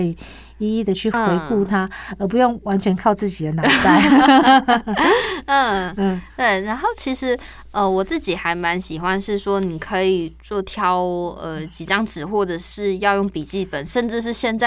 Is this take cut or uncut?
uncut